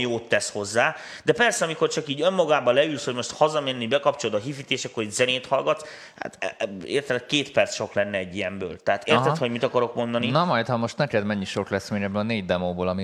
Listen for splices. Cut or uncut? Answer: uncut